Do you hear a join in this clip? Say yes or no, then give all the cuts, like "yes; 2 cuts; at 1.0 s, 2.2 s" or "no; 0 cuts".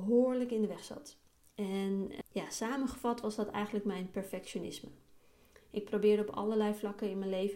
yes; 1 cut; at 2.2 s